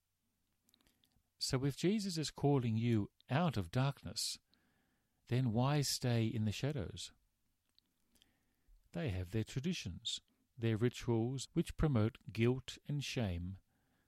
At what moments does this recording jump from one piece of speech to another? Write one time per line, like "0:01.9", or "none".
0:01.2
0:08.8
0:11.4